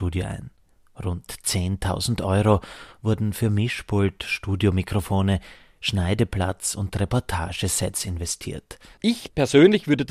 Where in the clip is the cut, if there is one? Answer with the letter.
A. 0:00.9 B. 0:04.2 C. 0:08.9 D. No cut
C